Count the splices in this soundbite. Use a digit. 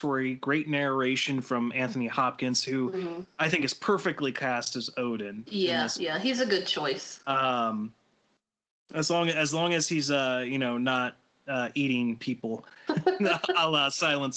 1